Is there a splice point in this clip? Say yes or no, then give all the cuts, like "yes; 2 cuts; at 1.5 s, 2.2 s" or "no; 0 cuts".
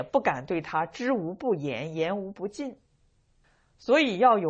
no; 0 cuts